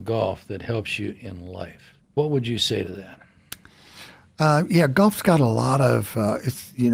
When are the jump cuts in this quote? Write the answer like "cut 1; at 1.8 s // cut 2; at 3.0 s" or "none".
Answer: cut 1; at 2.0 s